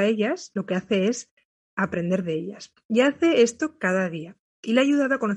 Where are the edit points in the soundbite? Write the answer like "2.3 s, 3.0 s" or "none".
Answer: none